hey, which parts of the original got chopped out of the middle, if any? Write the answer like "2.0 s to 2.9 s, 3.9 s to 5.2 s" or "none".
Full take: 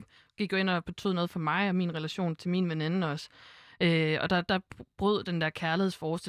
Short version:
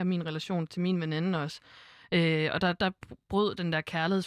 none